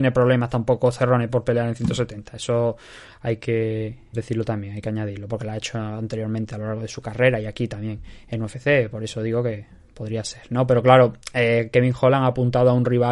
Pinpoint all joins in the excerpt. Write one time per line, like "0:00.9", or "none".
0:04.1